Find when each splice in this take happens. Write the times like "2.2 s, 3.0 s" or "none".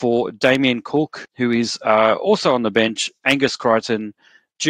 1.2 s